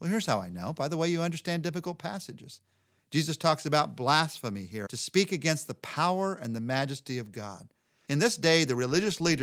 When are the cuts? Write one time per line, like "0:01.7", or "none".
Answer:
0:03.0
0:04.9
0:08.1